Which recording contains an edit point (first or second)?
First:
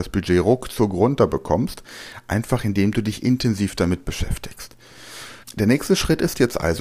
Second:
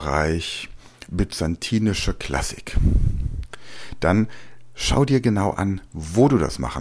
first